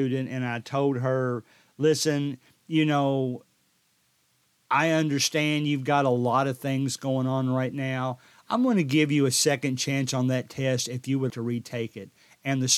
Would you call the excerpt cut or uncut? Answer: cut